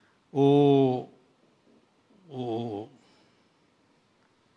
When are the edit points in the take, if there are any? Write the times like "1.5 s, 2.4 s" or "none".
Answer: none